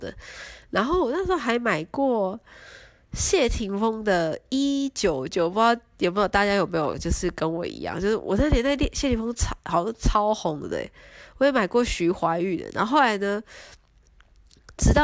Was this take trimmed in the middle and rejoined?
yes; 1 cut; at 5.3 s

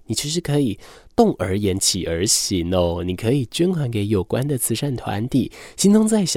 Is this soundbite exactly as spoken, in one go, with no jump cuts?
yes; 0 cuts

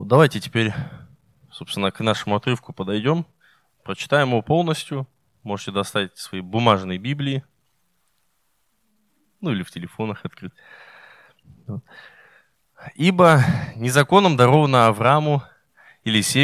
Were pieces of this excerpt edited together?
no; 0 cuts

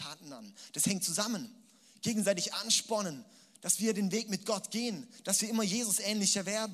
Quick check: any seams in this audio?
no; 0 cuts

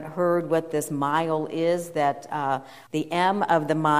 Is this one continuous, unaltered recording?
no; 1 cut; at 2.9 s

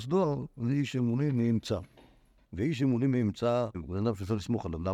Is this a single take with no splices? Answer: no; 2 cuts; at 2.4 s, 3.7 s

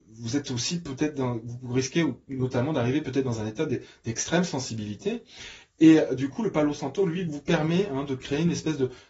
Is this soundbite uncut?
yes; 0 cuts

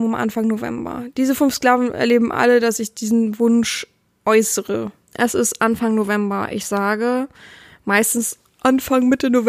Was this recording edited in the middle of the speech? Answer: yes; 1 cut; at 5.1 s

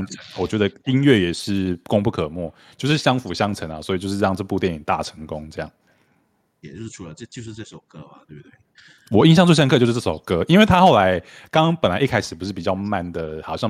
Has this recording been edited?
yes; 1 cut; at 6.6 s

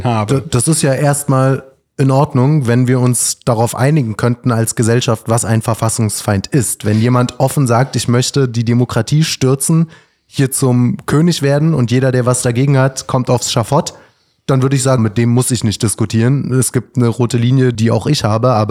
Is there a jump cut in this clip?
yes; 2 cuts; at 15.0 s, 17.7 s

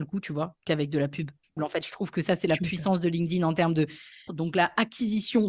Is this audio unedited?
no; 2 cuts; at 1.6 s, 4.3 s

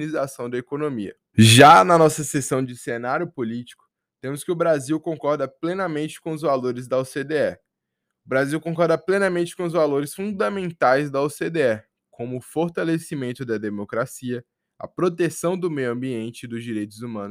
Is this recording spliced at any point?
yes; 1 cut; at 1.3 s

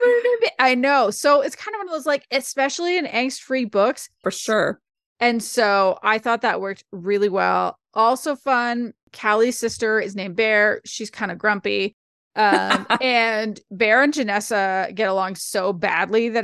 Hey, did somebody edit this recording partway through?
yes; 1 cut; at 4.2 s

